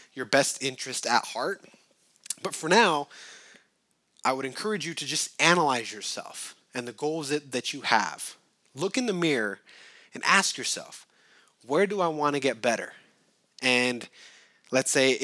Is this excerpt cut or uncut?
uncut